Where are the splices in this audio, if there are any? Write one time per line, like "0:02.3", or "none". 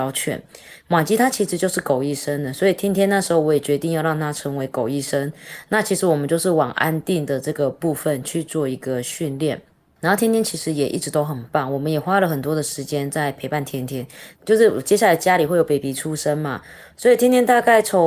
0:14.3
0:16.9